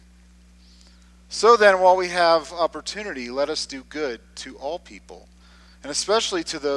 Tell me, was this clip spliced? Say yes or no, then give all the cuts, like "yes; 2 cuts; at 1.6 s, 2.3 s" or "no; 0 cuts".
no; 0 cuts